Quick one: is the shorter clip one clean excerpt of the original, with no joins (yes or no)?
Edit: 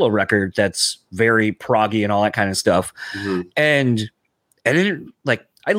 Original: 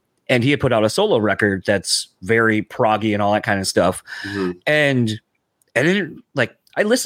yes